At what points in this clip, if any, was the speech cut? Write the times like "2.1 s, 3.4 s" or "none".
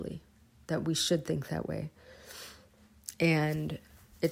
3.1 s